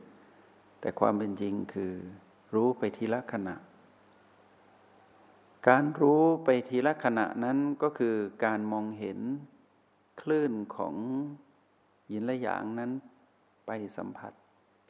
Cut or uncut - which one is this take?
uncut